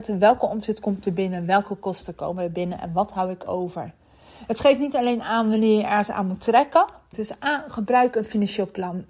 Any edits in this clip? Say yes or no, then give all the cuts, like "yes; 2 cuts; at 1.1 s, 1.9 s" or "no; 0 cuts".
yes; 1 cut; at 7.1 s